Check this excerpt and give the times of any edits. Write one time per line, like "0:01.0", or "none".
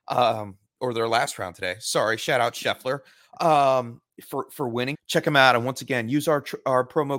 0:04.9